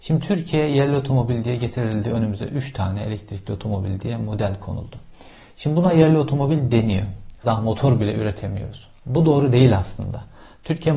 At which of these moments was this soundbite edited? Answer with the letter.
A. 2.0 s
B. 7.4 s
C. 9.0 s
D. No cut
B